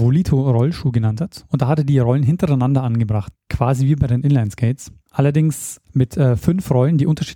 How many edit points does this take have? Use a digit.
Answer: 1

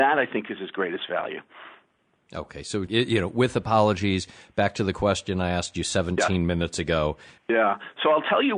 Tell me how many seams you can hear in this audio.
2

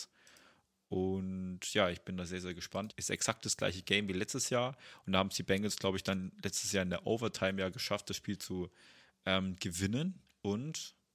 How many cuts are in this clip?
1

